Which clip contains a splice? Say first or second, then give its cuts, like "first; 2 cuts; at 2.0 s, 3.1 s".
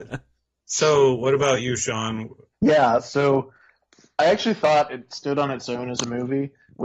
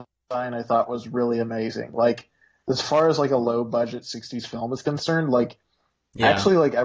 first; 1 cut; at 2.5 s